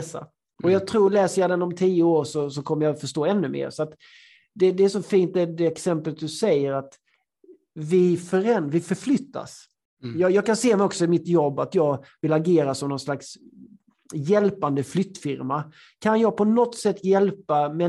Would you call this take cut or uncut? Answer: uncut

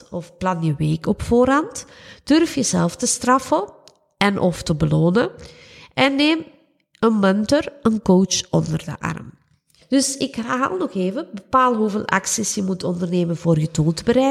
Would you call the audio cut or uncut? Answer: cut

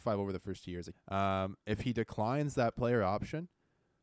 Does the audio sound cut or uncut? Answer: cut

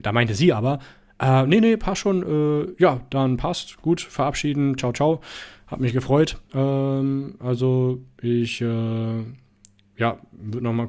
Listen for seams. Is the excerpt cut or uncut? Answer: cut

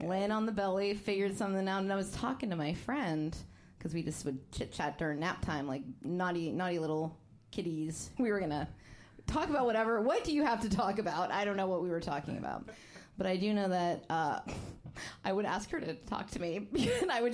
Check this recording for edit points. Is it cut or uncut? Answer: cut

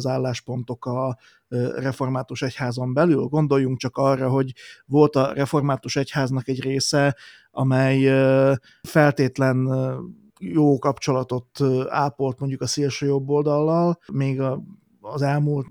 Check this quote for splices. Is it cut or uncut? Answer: uncut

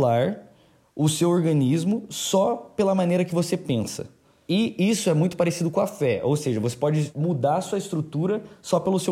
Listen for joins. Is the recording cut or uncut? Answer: uncut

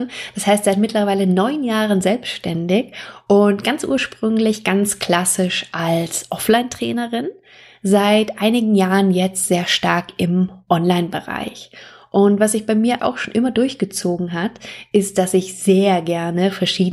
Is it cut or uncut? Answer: cut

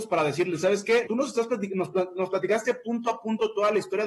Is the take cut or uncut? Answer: cut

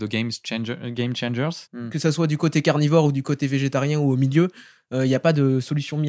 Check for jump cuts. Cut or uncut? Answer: cut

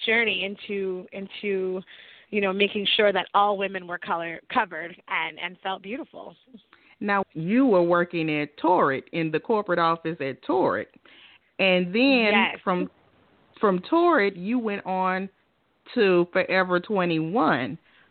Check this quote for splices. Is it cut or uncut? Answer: cut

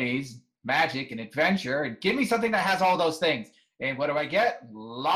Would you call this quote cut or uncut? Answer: uncut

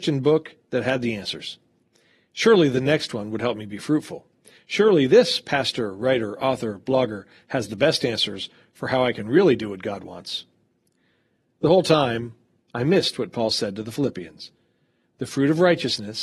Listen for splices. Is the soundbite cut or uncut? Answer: uncut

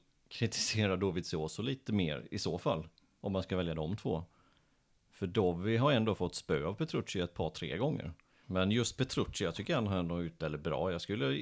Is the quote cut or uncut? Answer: cut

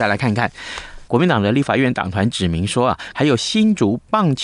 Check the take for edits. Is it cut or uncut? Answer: cut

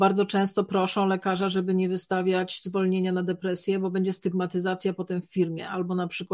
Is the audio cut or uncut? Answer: uncut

